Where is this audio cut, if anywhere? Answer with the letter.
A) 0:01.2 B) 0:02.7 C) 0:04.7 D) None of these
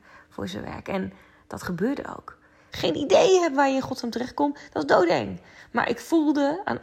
B